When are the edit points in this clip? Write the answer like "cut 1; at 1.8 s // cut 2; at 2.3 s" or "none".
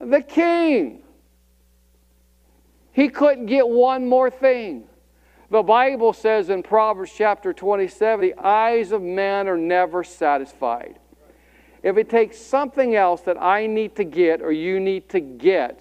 cut 1; at 8.2 s